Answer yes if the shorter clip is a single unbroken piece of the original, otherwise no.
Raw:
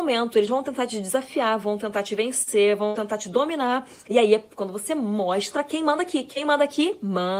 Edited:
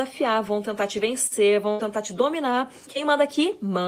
no